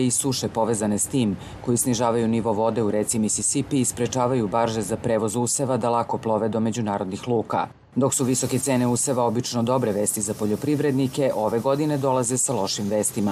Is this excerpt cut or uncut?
uncut